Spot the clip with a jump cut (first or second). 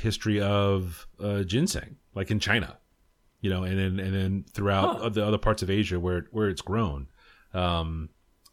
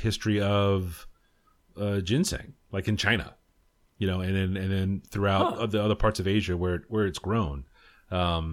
first